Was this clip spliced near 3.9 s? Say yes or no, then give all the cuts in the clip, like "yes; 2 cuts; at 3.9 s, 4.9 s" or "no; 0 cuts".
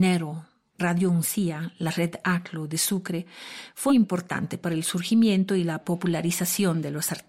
yes; 1 cut; at 3.9 s